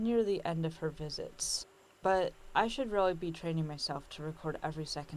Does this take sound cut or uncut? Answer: uncut